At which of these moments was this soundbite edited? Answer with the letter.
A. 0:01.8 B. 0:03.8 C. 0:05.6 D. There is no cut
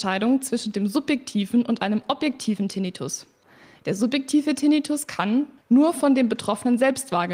C